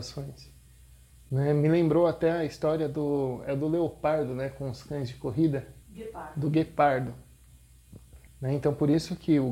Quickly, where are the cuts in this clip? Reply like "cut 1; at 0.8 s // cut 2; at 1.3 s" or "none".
cut 1; at 5.8 s // cut 2; at 8.3 s